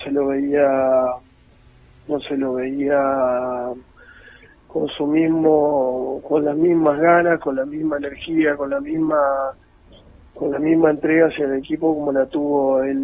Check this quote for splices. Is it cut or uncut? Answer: uncut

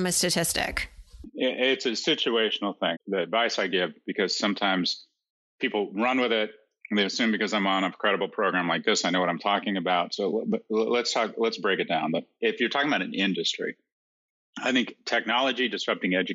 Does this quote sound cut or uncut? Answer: cut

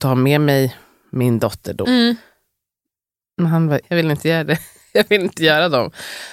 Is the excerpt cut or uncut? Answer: cut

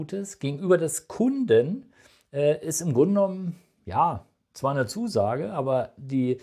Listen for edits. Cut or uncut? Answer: uncut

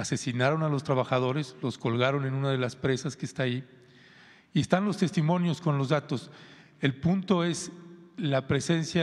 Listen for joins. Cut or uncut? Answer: uncut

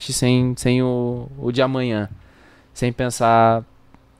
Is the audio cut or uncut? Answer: uncut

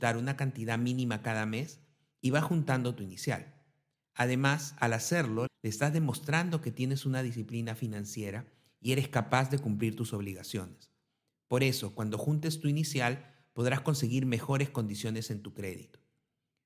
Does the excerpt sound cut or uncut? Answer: cut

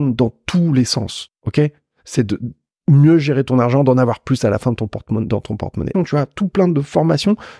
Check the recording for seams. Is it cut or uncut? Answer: cut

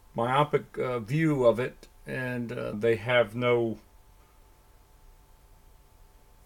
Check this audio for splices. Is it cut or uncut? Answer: cut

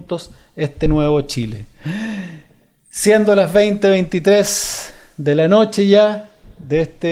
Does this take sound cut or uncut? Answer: uncut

